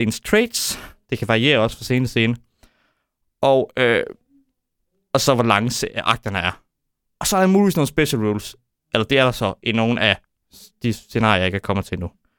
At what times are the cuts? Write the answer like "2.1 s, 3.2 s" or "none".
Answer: none